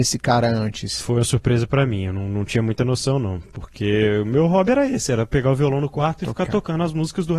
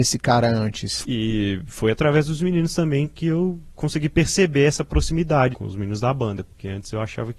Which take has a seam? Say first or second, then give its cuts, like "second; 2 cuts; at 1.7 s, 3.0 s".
second; 2 cuts; at 1.0 s, 5.5 s